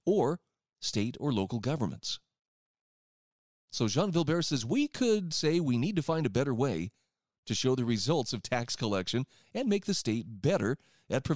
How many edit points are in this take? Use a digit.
0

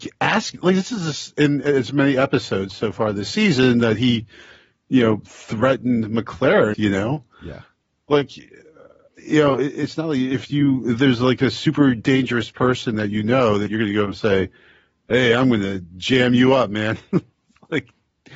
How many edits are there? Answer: 1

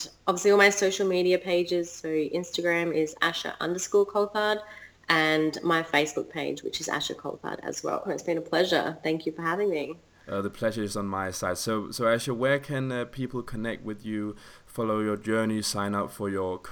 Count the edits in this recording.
1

